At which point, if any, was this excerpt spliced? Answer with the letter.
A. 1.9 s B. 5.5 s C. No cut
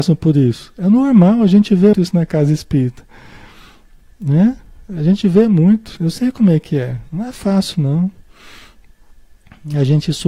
A